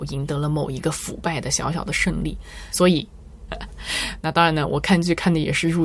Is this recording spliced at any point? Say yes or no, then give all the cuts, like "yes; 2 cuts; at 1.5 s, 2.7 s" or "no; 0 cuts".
yes; 1 cut; at 3.5 s